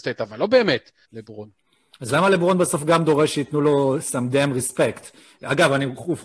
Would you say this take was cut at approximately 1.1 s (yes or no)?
yes